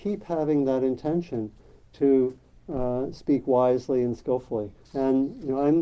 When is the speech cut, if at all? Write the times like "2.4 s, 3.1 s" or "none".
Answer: 4.8 s